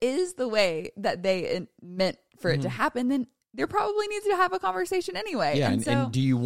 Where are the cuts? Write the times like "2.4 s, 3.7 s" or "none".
none